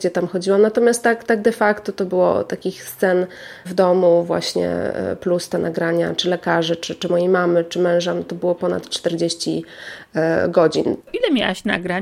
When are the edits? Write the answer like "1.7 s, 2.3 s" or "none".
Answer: 11.0 s